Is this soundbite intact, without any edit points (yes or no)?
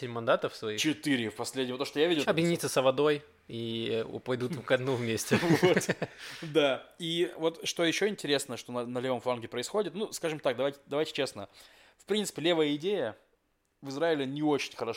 no